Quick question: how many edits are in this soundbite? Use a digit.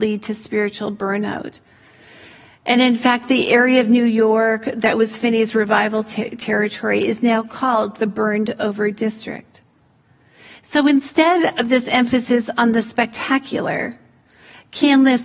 0